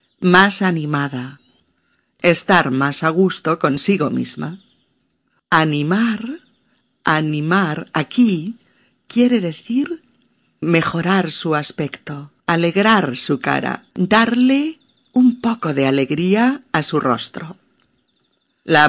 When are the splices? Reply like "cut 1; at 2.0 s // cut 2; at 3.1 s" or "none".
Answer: cut 1; at 10.6 s // cut 2; at 12.4 s // cut 3; at 13.9 s